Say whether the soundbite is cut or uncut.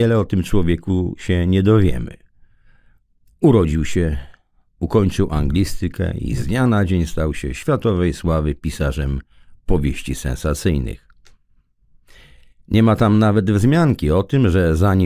uncut